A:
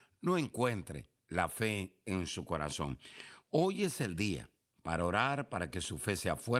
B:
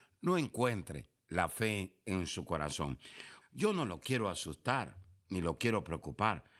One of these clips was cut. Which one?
B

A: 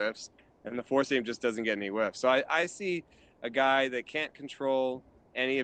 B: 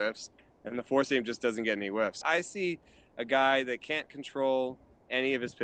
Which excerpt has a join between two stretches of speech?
B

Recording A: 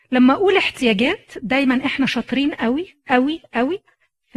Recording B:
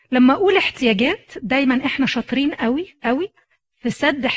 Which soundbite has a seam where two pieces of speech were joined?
B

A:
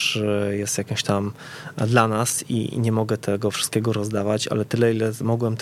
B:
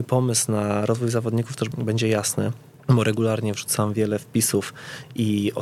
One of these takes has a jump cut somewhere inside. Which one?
B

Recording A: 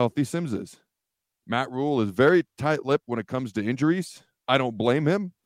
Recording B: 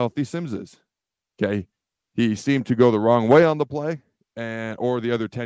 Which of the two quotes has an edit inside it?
B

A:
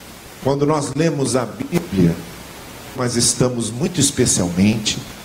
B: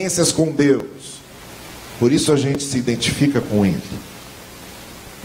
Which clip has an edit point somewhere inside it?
A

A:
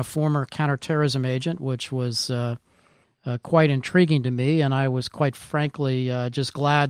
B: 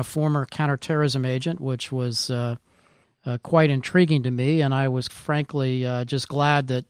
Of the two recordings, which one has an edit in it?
B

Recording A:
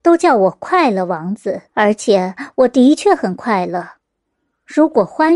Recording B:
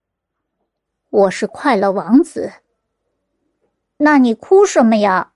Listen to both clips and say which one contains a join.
A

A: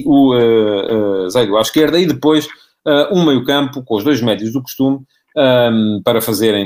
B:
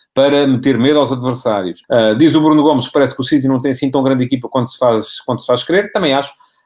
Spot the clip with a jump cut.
B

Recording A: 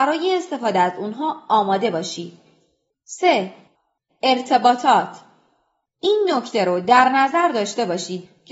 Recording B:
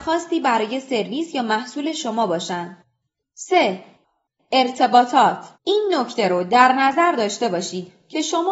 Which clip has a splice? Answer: B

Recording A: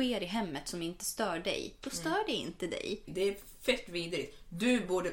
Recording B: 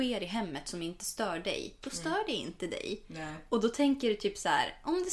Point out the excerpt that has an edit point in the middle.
A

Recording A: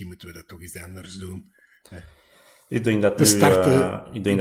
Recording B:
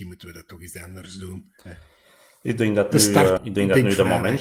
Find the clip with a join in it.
B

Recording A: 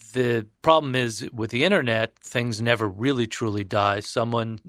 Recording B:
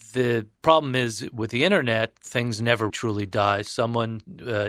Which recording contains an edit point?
B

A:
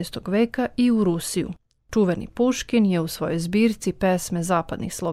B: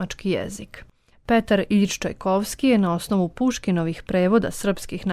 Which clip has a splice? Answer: B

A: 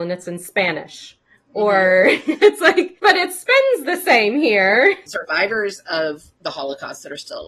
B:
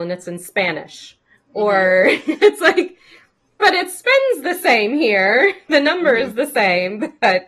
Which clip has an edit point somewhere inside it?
A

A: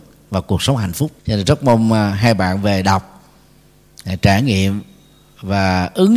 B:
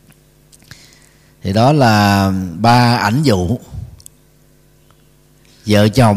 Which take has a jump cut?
A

